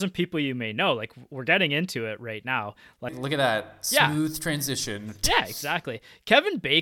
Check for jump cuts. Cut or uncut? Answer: cut